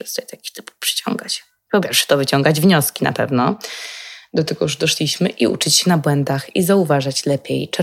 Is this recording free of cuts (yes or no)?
yes